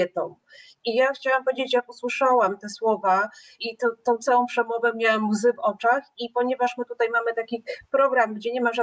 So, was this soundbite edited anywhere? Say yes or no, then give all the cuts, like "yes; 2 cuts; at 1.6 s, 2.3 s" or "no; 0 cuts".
yes; 1 cut; at 3.6 s